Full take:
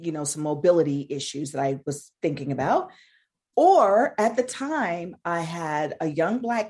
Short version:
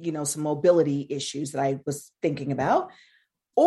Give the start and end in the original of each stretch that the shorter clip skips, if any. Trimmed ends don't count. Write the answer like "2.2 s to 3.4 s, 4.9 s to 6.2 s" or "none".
none